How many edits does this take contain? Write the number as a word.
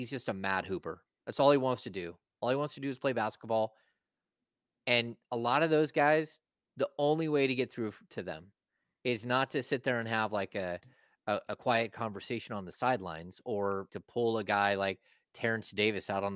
one